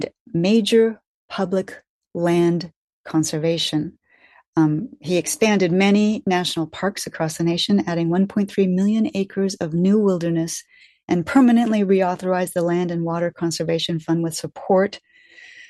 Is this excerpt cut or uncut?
uncut